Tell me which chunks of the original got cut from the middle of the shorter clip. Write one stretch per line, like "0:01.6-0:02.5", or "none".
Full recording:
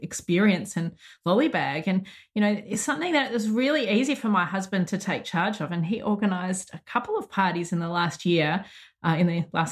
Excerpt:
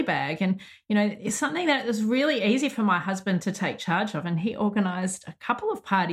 none